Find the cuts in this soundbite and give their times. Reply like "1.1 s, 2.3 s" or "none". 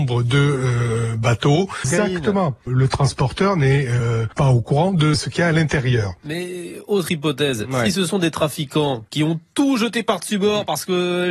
1.8 s